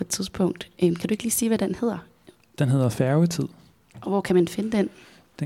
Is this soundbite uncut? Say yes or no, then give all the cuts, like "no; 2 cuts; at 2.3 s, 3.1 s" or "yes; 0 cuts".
yes; 0 cuts